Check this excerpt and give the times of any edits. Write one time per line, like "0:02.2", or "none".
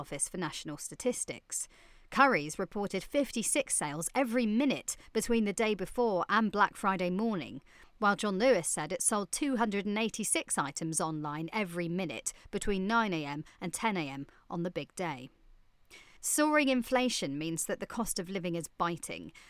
0:16.2